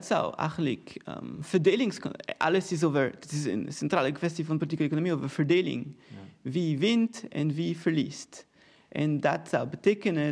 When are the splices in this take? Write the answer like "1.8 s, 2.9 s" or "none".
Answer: none